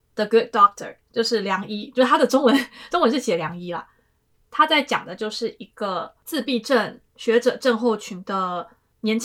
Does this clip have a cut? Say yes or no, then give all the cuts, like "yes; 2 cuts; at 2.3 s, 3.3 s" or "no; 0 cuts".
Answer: yes; 1 cut; at 7.1 s